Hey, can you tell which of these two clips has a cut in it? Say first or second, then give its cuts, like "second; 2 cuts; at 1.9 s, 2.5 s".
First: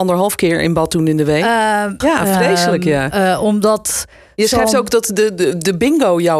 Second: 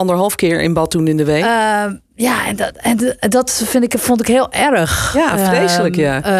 first; 1 cut; at 2.0 s